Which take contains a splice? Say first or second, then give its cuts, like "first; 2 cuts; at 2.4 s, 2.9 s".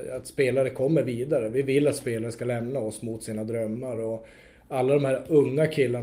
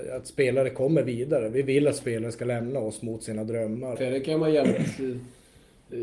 second; 1 cut; at 3.9 s